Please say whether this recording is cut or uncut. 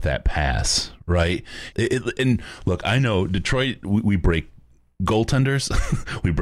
cut